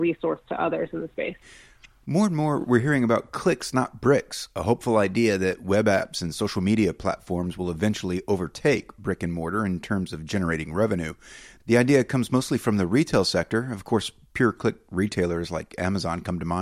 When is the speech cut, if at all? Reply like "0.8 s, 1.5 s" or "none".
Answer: none